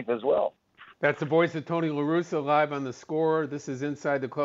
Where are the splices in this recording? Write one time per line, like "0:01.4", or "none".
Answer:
0:00.9